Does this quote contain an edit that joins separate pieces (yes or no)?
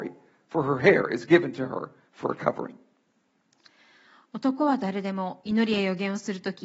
no